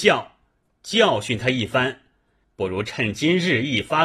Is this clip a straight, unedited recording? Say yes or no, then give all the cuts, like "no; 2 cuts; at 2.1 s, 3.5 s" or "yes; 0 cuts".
no; 1 cut; at 2.4 s